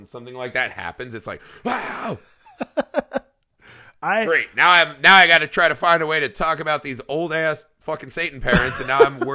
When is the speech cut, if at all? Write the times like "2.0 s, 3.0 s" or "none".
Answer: none

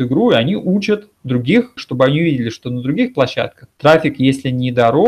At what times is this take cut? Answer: 1.8 s, 3.7 s

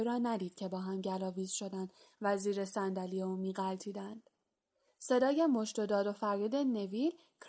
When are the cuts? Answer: none

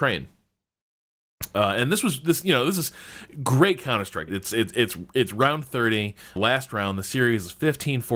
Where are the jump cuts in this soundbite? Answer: 4.3 s, 6.4 s

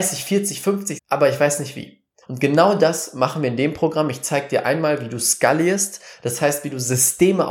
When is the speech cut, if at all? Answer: 1.0 s, 2.2 s

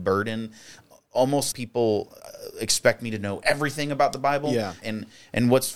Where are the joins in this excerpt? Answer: 1.5 s, 4.8 s

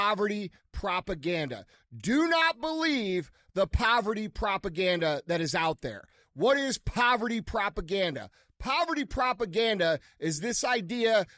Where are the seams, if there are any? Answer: 6.2 s

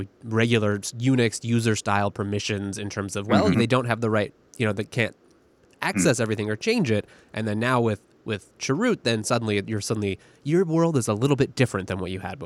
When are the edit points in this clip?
3.5 s

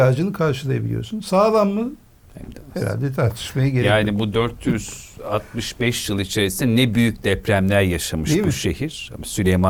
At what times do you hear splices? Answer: none

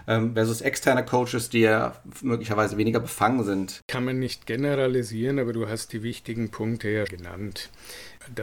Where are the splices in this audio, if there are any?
3.8 s, 7.1 s

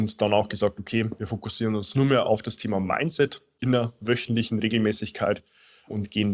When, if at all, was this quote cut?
none

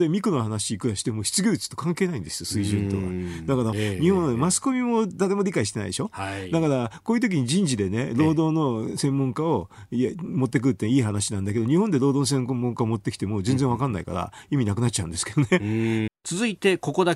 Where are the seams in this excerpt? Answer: 3.7 s, 16.1 s

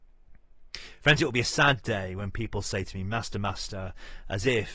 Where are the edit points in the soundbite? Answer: none

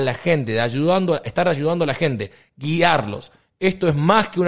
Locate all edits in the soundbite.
none

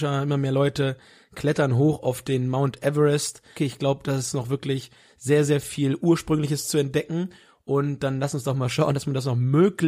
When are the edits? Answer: 3.6 s

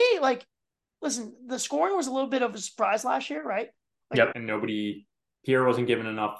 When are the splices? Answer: 4.3 s

